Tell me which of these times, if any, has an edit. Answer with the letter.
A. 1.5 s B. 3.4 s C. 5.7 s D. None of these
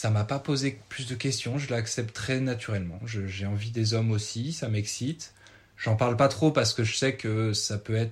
D